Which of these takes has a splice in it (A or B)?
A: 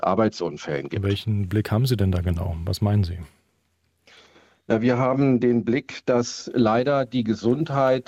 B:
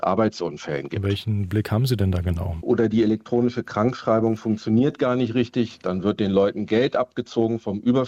B